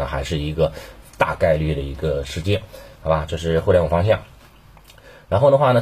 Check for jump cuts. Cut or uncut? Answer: uncut